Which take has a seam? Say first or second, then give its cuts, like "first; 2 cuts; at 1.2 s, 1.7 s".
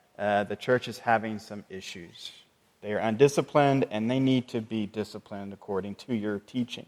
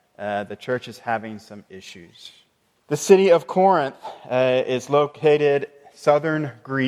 second; 1 cut; at 2.8 s